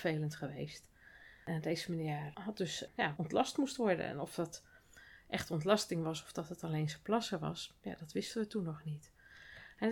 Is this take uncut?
no; 1 cut; at 3.2 s

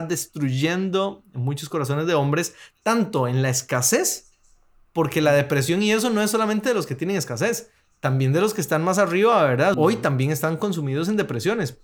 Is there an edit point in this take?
yes; 1 cut; at 9.7 s

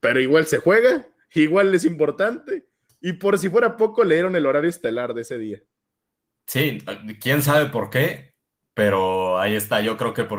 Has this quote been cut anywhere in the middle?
no; 0 cuts

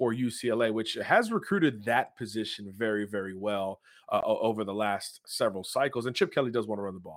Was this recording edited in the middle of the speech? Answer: no; 0 cuts

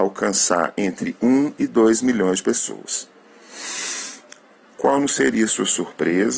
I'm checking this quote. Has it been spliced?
yes; 1 cut; at 4.7 s

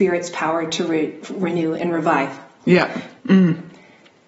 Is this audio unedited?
no; 1 cut; at 3.2 s

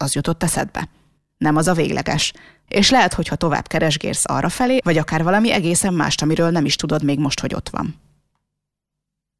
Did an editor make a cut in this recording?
yes; 2 cuts; at 2.7 s, 4.8 s

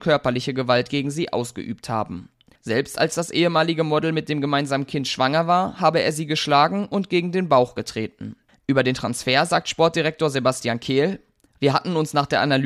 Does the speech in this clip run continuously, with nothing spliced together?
no; 1 cut; at 8.5 s

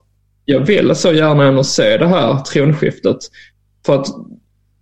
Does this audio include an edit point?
no; 0 cuts

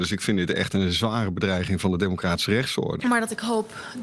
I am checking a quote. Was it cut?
yes; 1 cut; at 3.0 s

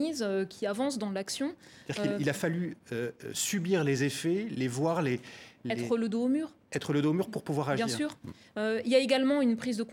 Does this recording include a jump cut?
no; 0 cuts

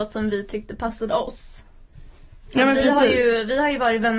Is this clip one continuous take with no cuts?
yes; 0 cuts

